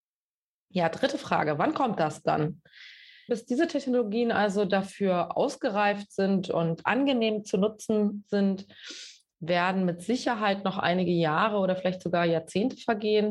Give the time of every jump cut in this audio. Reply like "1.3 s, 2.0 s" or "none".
3.3 s

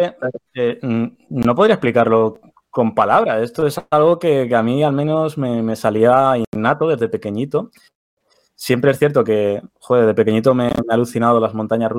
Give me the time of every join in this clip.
none

